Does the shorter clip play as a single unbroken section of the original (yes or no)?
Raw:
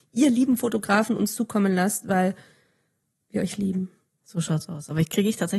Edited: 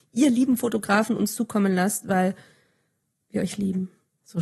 yes